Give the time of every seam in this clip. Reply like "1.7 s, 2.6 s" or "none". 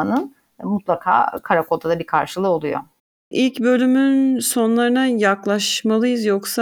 none